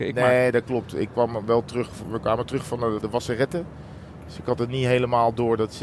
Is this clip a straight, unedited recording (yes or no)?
no